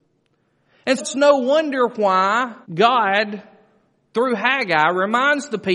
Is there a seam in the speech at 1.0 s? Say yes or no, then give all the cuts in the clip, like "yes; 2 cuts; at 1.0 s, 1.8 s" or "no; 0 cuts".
yes; 2 cuts; at 1.0 s, 2.6 s